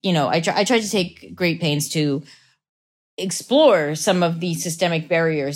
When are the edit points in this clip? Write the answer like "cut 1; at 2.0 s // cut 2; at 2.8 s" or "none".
none

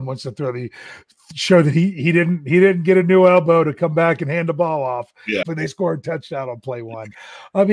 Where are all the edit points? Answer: cut 1; at 5.4 s

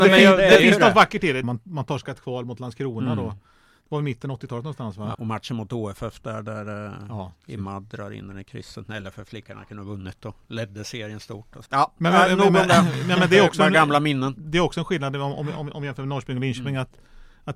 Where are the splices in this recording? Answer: cut 1; at 1.4 s // cut 2; at 5.1 s // cut 3; at 11.7 s

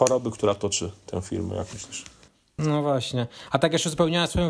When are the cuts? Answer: cut 1; at 2.6 s

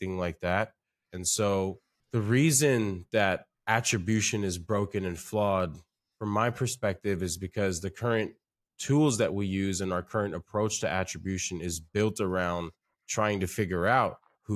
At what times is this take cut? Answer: cut 1; at 1.0 s

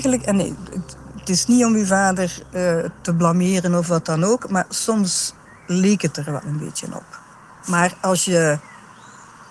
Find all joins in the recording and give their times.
none

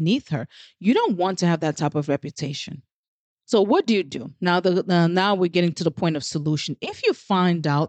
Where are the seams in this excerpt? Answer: none

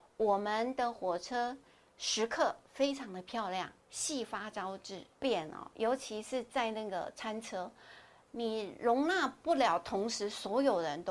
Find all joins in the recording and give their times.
cut 1; at 3.8 s // cut 2; at 5.1 s

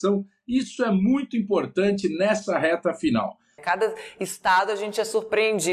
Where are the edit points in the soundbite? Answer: cut 1; at 3.6 s

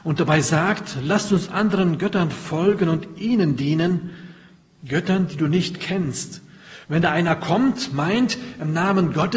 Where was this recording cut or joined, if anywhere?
cut 1; at 6.8 s

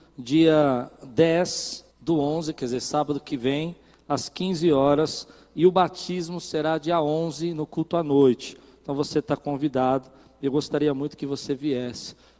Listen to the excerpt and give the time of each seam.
cut 1; at 1.9 s

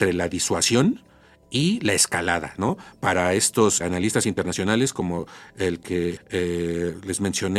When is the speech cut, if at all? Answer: cut 1; at 3.8 s // cut 2; at 6.2 s

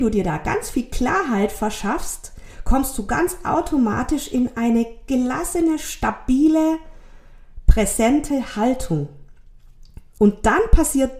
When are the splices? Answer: cut 1; at 10.2 s

